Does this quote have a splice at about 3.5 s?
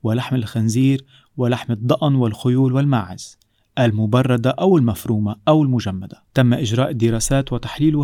no; 1 cut; at 6.3 s

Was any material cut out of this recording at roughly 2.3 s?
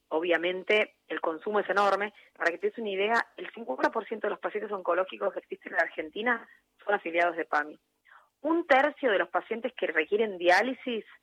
yes; 1 cut; at 2.3 s

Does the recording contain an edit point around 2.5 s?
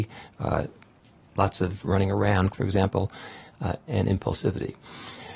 yes; 2 cuts; at 2.5 s, 3.9 s

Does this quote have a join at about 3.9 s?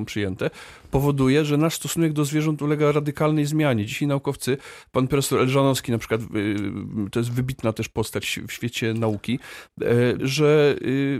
no; 1 cut; at 10.2 s

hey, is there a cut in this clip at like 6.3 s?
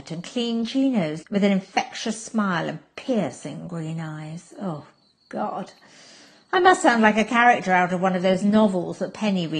no; 1 cut; at 1.2 s

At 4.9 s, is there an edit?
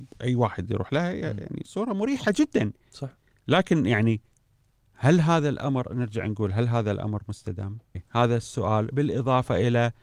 no; 1 cut; at 7.9 s

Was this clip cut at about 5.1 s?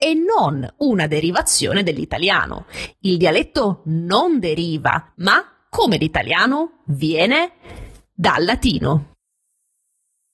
yes; 1 cut; at 5.1 s

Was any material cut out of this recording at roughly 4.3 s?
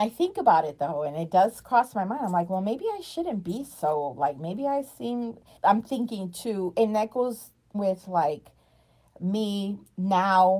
no; 2 cuts; at 5.6 s, 7.7 s

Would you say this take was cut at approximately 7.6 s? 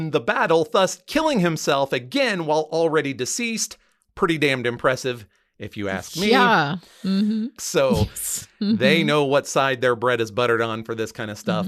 yes; 1 cut; at 7.6 s

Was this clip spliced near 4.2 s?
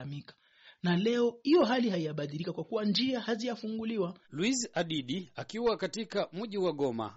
yes; 1 cut; at 4.2 s

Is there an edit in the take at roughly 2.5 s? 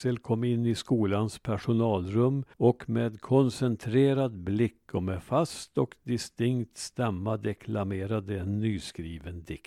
yes; 1 cut; at 2.5 s

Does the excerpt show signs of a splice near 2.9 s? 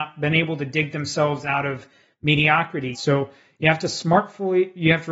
yes; 1 cut; at 2.9 s

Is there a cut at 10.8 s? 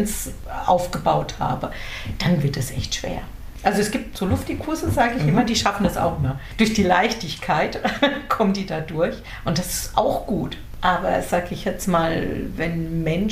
no; 0 cuts

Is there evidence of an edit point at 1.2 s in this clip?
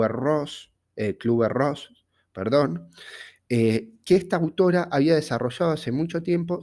no; 0 cuts

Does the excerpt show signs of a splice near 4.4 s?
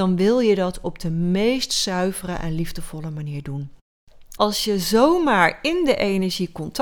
yes; 1 cut; at 4.4 s

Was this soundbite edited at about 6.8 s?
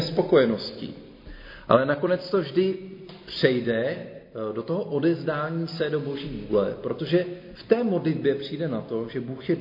no; 0 cuts

